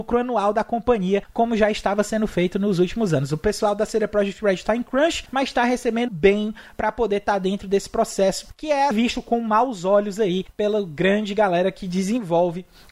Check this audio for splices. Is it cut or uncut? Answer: cut